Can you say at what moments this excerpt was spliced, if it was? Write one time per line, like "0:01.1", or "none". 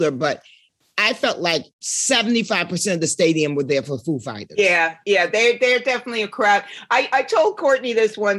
0:01.7